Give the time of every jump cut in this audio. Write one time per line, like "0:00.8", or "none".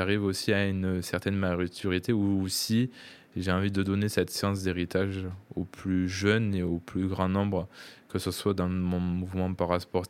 none